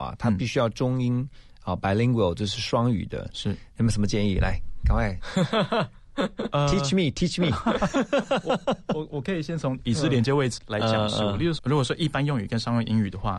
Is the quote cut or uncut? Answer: cut